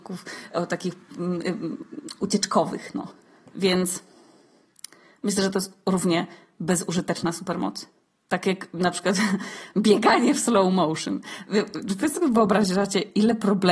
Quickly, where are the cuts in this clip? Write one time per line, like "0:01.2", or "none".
none